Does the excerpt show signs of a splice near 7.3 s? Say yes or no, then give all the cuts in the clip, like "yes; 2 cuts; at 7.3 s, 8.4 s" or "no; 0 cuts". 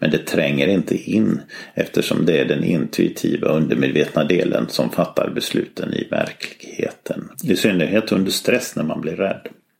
yes; 1 cut; at 7.3 s